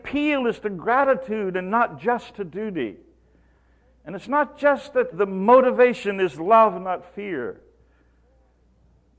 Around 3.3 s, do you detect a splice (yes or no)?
no